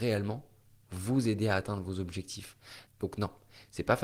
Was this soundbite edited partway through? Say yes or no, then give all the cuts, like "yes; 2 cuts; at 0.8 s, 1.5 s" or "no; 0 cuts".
yes; 1 cut; at 2.9 s